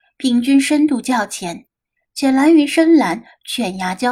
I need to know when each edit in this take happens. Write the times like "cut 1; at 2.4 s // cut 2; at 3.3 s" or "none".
none